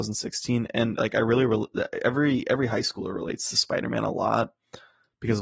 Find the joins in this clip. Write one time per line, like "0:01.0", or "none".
none

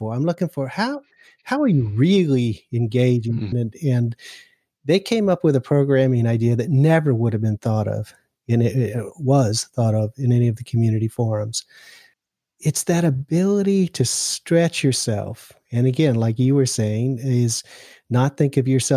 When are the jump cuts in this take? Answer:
0:03.5

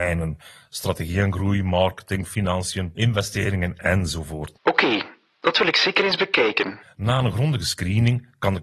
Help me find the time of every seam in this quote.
0:02.9
0:04.5
0:06.8

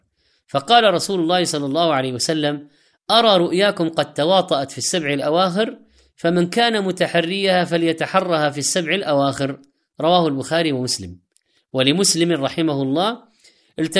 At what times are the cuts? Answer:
none

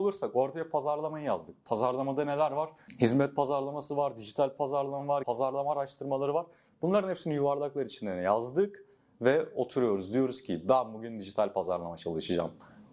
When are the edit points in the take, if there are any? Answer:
0:05.2

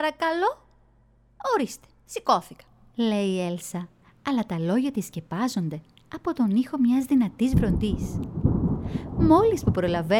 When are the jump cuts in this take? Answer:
none

